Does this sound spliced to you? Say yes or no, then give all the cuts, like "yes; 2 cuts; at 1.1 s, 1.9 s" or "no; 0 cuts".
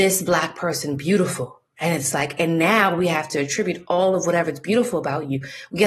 no; 0 cuts